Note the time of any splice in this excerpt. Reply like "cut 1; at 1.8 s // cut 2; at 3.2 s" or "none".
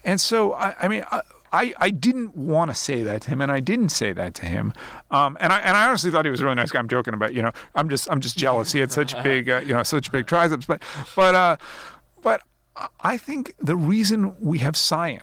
none

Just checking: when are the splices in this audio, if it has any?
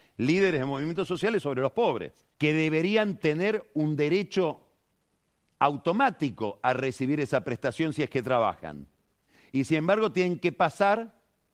cut 1; at 2.3 s

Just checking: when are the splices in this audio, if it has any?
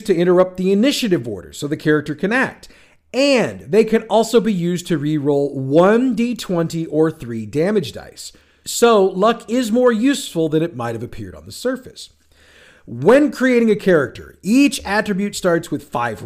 none

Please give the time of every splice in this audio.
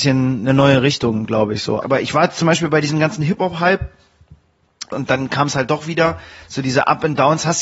cut 1; at 1.8 s // cut 2; at 4.9 s

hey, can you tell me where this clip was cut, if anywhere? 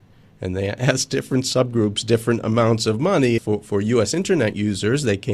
cut 1; at 3.4 s

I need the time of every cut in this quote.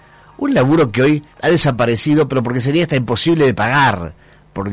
cut 1; at 1.3 s

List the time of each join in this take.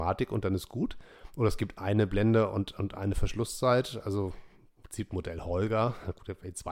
none

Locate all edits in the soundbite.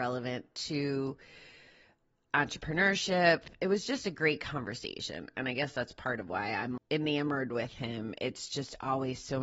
cut 1; at 6.8 s

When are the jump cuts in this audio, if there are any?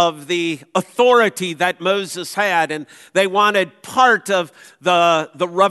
none

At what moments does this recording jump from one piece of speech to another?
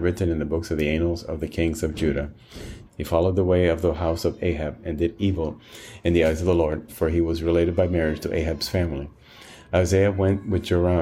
cut 1; at 2.9 s // cut 2; at 6.9 s

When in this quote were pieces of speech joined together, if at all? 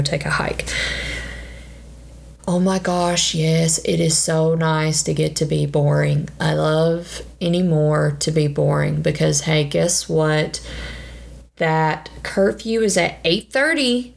cut 1; at 2.4 s

